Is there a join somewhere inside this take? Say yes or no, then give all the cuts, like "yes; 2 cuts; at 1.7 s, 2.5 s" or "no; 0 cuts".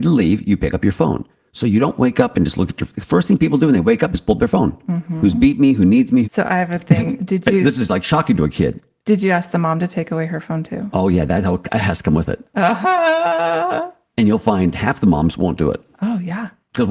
yes; 1 cut; at 6.2 s